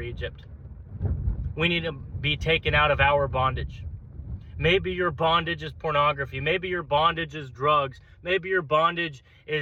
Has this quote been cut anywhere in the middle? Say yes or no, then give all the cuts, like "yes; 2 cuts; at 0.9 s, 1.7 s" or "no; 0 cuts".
no; 0 cuts